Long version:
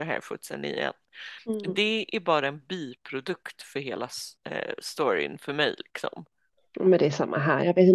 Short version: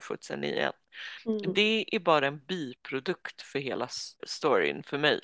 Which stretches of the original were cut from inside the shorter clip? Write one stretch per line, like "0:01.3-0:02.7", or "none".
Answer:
0:04.4-0:04.8